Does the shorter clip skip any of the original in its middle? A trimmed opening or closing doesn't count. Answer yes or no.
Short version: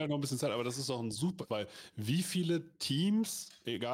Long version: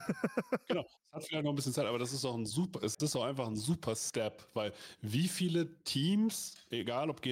yes